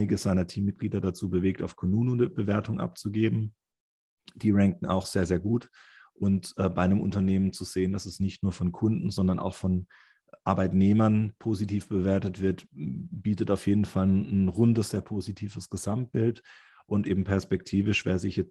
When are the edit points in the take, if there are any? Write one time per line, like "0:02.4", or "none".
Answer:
0:11.4